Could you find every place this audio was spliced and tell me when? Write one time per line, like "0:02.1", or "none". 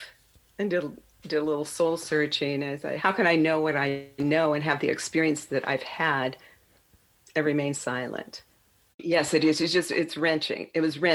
0:03.0
0:08.9